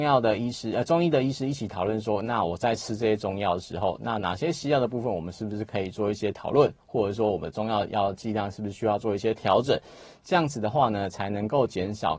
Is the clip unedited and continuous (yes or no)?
yes